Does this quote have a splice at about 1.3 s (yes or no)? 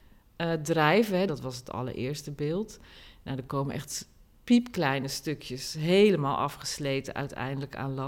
yes